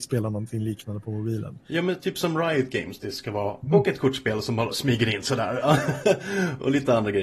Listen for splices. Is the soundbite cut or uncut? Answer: cut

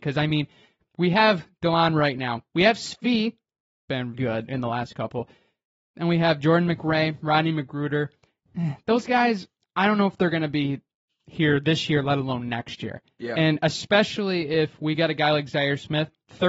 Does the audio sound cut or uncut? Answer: cut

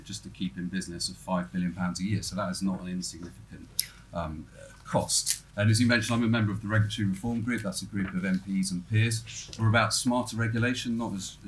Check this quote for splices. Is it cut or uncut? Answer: uncut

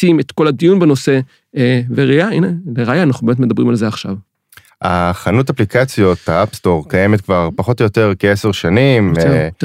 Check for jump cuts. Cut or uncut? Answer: uncut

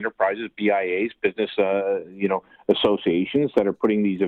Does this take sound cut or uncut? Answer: uncut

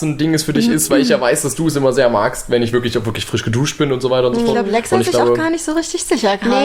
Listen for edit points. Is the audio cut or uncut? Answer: uncut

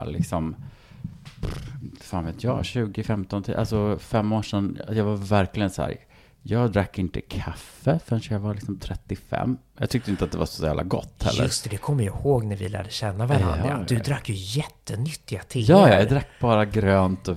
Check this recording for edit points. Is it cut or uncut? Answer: uncut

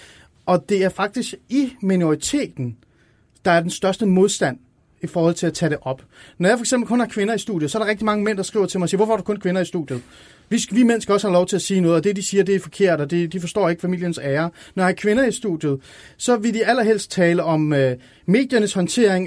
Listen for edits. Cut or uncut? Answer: uncut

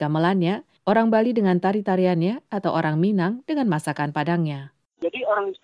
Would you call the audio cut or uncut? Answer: uncut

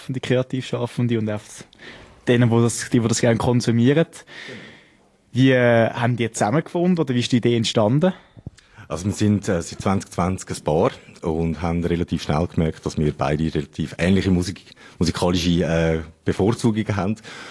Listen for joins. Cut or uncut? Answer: uncut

